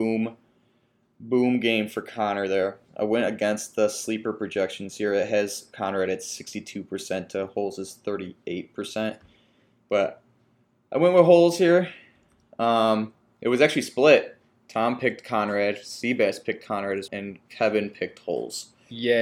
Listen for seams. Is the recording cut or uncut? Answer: cut